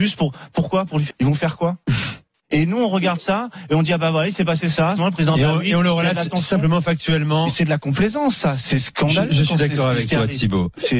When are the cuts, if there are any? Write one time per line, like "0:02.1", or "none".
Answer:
0:01.1
0:05.0